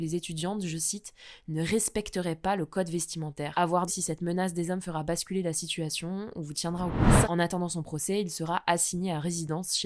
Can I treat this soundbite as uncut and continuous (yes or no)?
no